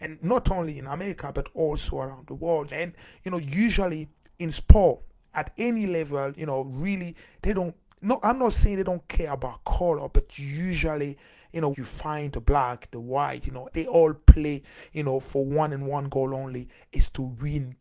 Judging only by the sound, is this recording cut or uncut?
cut